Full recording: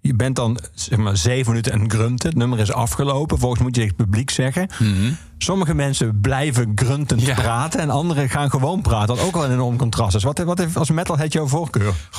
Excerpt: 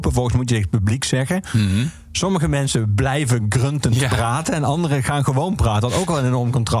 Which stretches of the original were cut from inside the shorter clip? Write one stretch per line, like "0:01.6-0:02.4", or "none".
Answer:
none